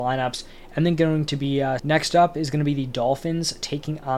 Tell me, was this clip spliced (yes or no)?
yes